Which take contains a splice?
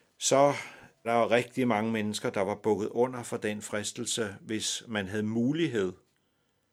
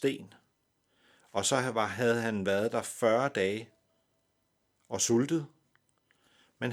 first; 1 cut; at 1.0 s

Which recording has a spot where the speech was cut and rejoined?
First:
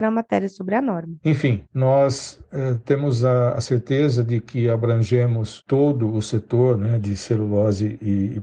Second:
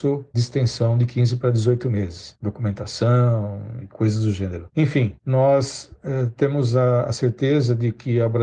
first; 1 cut; at 1.2 s

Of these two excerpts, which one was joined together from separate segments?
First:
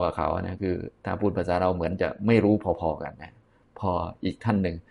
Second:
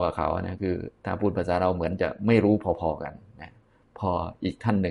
first; 1 cut; at 3.1 s

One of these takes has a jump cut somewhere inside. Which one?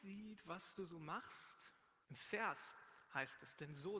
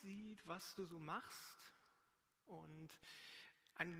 first; 1 cut; at 2.0 s

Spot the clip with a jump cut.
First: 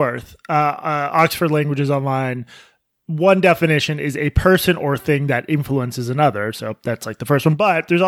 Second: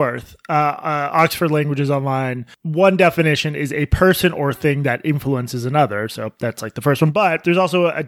second; 1 cut; at 2.5 s

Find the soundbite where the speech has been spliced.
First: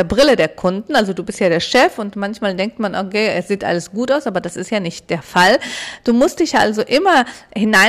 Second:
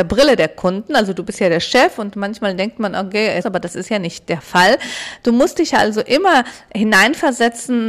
second; 1 cut; at 3.4 s

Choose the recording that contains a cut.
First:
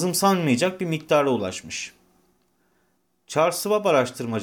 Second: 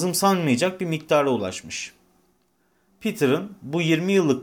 second; 1 cut; at 2.9 s

